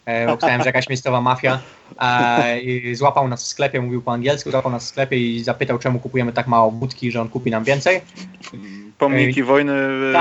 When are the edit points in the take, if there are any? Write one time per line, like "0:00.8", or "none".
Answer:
0:08.5